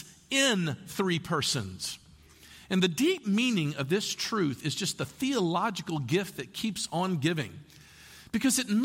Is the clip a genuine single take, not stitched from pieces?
yes; 0 cuts

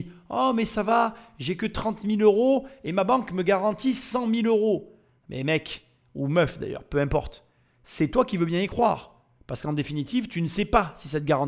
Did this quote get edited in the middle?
no; 0 cuts

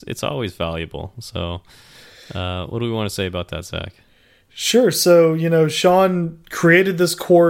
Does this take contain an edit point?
no; 0 cuts

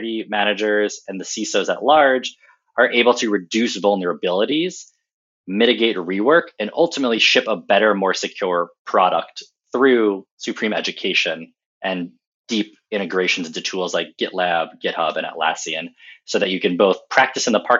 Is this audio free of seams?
yes; 0 cuts

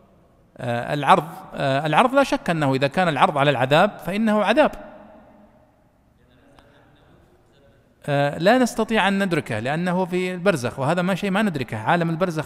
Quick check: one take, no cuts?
yes; 0 cuts

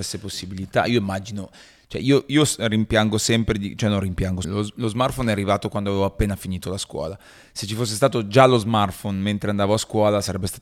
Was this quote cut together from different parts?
yes; 1 cut; at 4.4 s

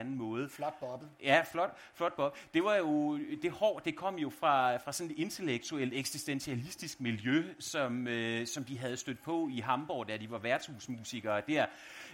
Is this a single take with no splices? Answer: yes; 0 cuts

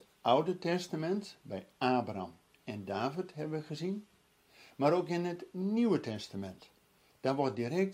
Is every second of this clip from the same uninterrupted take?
yes; 0 cuts

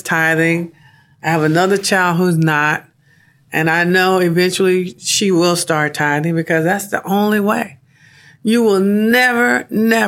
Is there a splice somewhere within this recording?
no; 0 cuts

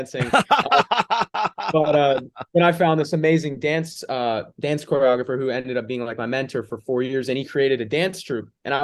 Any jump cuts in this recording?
no; 0 cuts

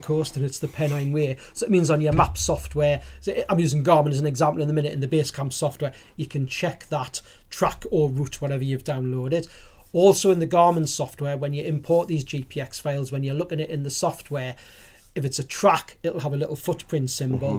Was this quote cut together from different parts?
no; 0 cuts

